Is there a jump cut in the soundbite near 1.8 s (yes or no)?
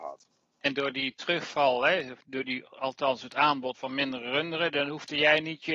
no